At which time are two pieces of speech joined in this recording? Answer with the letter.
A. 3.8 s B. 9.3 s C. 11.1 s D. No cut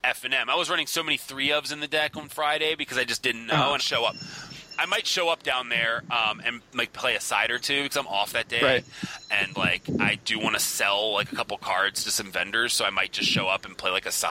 A